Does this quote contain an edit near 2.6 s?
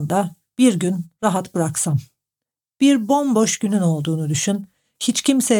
no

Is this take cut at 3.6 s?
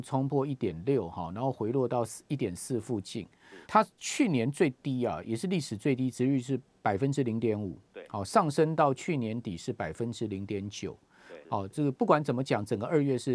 yes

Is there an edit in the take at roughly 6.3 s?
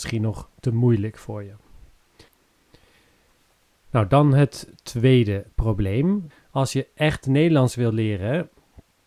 yes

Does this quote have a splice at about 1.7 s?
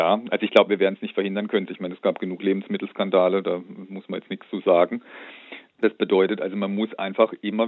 yes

